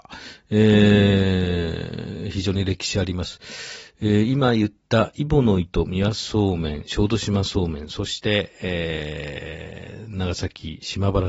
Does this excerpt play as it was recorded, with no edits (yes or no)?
yes